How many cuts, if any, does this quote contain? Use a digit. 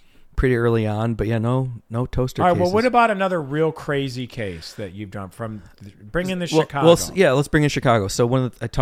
0